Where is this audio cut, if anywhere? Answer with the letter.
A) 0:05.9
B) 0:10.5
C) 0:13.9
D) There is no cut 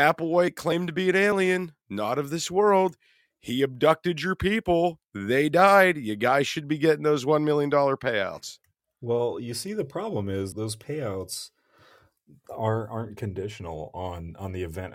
B